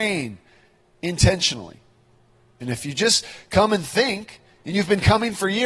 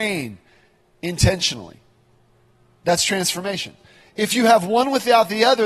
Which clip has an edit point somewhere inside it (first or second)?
first